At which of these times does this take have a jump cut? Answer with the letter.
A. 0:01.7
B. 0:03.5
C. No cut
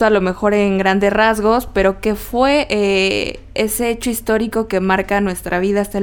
C